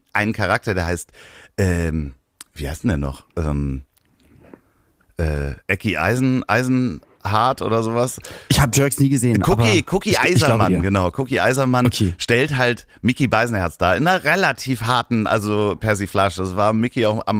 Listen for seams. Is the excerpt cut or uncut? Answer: uncut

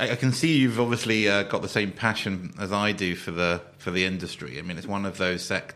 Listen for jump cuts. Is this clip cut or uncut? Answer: uncut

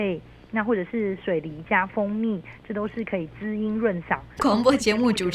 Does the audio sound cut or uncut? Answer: cut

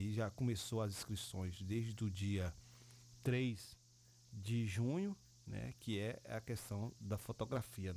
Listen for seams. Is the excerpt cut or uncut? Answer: uncut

